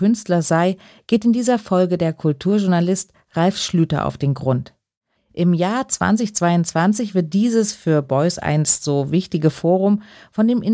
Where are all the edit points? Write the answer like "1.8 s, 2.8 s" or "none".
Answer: 5.2 s